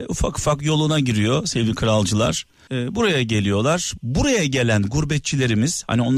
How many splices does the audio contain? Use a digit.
2